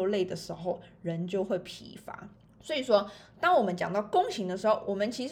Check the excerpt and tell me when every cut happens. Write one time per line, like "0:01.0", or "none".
0:02.5

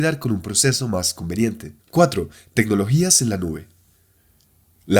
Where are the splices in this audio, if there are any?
0:01.8

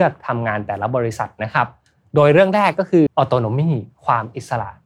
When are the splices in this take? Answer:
0:03.1

